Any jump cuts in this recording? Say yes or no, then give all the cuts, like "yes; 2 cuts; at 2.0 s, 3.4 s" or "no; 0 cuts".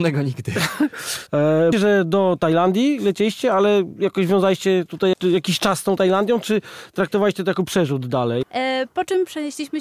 yes; 3 cuts; at 1.7 s, 5.1 s, 8.4 s